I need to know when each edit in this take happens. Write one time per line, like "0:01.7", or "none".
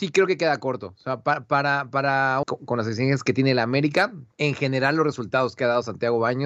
0:02.4
0:04.3